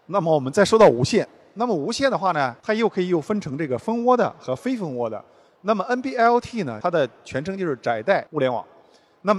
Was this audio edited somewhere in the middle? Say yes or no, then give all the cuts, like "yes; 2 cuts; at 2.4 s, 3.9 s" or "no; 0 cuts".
no; 0 cuts